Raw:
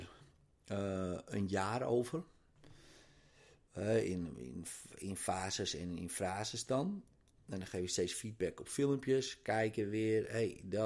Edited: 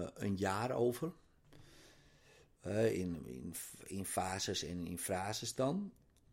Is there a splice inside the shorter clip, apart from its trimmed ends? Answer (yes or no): no